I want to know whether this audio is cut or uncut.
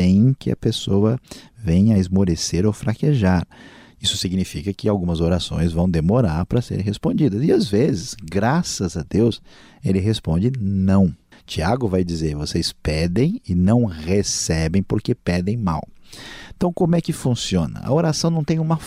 cut